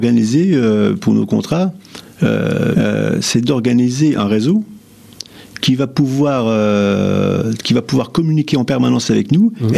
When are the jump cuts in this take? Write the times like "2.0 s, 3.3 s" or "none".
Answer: 2.7 s

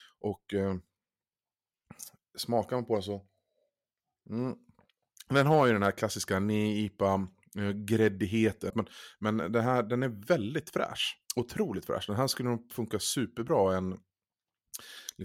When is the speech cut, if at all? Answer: 8.7 s, 11.3 s

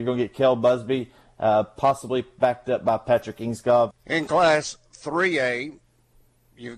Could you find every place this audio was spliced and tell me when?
3.9 s

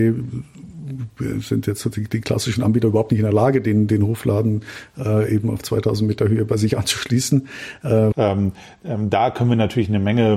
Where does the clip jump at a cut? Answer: 8.1 s

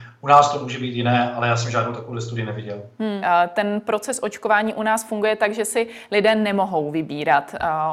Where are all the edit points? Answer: 3.2 s

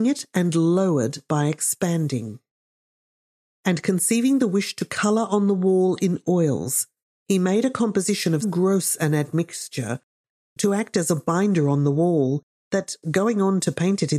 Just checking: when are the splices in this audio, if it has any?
8.4 s

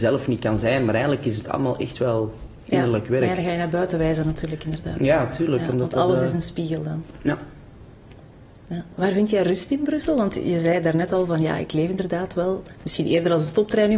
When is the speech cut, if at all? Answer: none

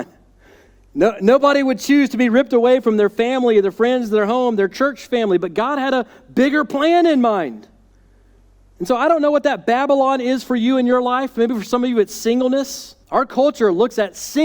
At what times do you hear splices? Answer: 13.0 s

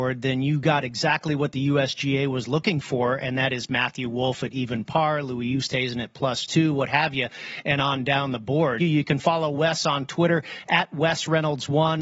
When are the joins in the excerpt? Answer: 8.8 s

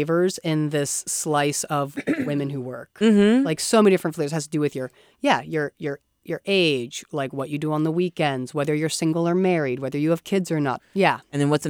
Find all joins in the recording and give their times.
10.8 s

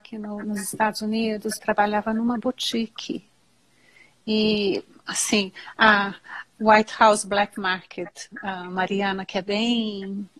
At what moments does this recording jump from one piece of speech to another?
1.6 s

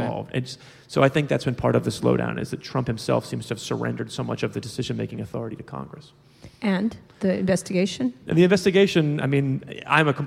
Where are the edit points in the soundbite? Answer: none

